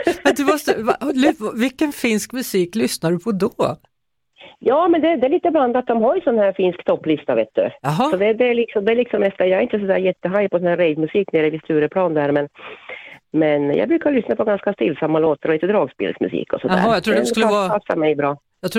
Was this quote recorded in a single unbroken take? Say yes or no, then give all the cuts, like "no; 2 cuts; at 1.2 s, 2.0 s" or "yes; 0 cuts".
yes; 0 cuts